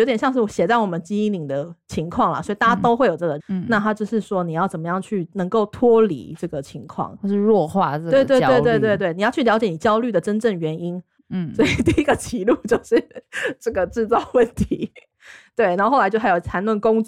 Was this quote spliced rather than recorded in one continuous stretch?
yes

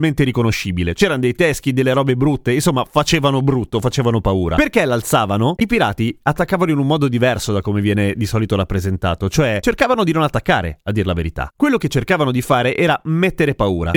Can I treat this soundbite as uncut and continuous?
no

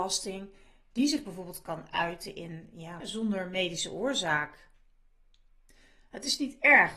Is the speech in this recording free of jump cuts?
no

